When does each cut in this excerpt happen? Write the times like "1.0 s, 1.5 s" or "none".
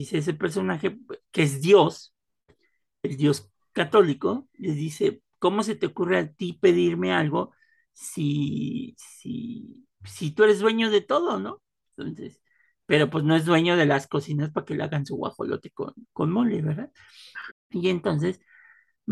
16.0 s, 17.5 s